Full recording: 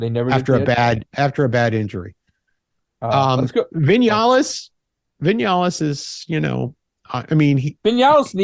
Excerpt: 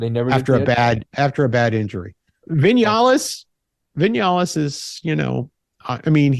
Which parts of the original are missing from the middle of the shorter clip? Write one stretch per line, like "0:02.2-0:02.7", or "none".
0:02.4-0:03.7